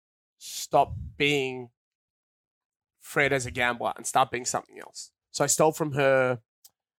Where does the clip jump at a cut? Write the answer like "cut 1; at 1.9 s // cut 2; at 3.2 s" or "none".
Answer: cut 1; at 5.2 s